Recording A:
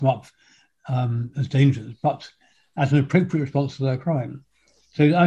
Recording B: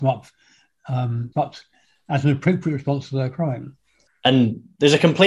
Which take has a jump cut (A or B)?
B